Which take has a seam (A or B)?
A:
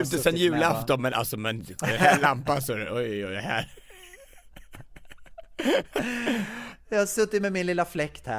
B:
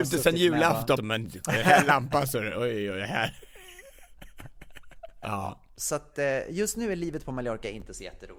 B